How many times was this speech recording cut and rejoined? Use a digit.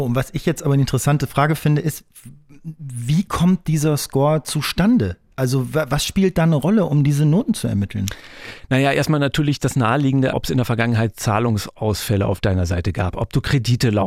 1